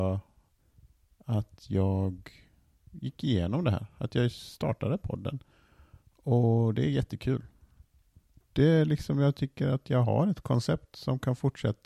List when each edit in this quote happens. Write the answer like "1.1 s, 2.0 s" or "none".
8.4 s